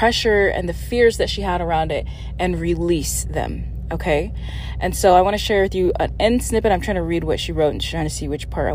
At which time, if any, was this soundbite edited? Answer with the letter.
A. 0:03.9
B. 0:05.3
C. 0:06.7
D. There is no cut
D